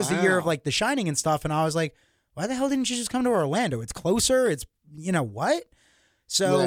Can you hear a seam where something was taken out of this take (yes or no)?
no